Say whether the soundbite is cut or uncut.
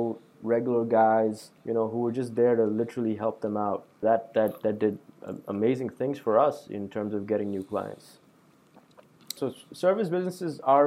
cut